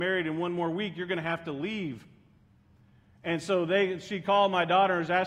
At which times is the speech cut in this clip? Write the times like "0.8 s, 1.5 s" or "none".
none